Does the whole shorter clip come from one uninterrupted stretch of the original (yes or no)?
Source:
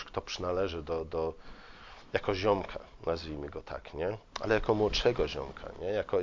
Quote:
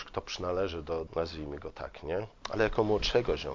no